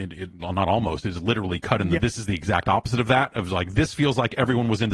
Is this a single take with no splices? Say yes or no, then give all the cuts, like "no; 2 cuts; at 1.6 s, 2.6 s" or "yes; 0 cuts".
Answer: no; 1 cut; at 2.0 s